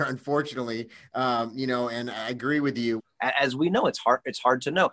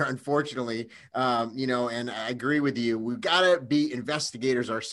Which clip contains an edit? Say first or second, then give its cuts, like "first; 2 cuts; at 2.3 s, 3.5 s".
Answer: first; 1 cut; at 3.0 s